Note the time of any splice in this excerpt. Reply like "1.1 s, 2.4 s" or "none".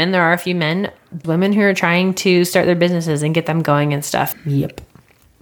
1.2 s, 4.3 s